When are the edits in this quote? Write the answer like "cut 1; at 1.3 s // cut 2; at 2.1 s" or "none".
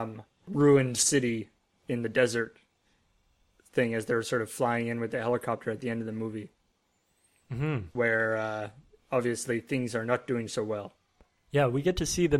none